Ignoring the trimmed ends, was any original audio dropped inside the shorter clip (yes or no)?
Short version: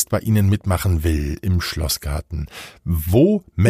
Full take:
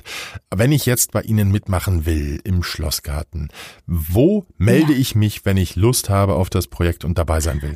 no